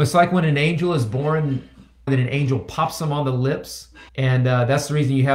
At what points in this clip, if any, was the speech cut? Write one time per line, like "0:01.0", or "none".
0:02.1
0:04.1